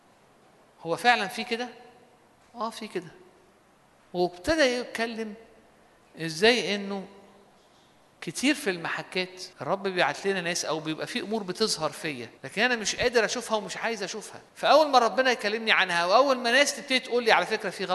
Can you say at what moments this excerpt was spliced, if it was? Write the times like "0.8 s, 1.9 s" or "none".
9.5 s, 12.4 s, 14.5 s